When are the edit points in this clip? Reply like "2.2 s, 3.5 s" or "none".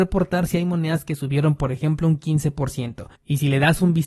3.2 s

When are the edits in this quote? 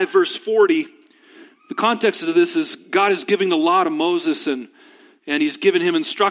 none

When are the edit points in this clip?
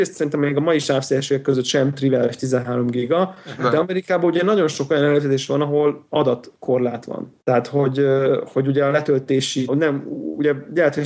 7.4 s, 9.7 s

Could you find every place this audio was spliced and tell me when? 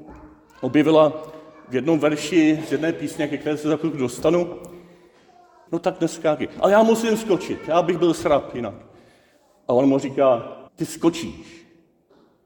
5.7 s, 10.7 s

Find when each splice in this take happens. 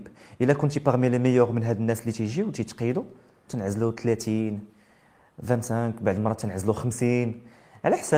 3.5 s

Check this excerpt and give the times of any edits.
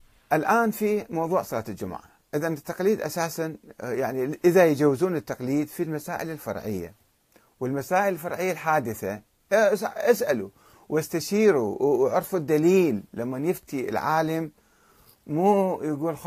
none

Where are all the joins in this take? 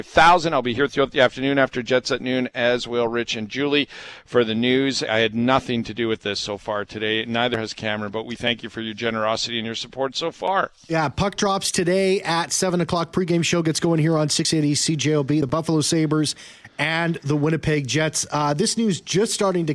5.1 s

